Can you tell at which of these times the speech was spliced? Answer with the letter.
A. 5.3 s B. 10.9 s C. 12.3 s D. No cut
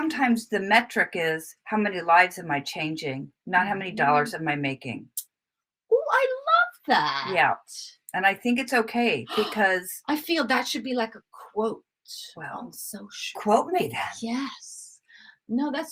D